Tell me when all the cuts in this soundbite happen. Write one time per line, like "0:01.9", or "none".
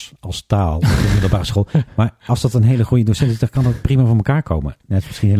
none